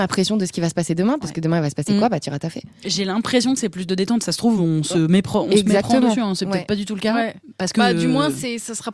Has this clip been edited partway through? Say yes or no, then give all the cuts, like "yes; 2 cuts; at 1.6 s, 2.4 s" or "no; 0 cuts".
no; 0 cuts